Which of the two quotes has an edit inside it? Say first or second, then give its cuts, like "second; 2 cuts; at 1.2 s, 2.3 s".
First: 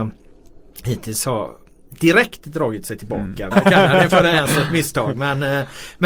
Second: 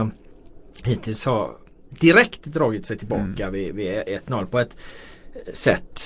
first; 1 cut; at 3.5 s